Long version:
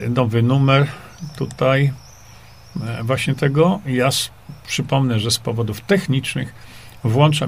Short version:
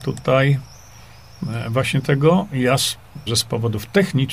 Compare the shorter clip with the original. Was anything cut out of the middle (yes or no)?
yes